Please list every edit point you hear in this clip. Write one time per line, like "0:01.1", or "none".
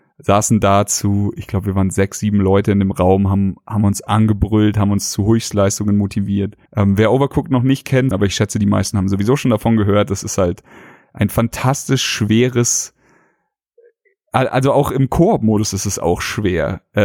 0:06.7
0:08.1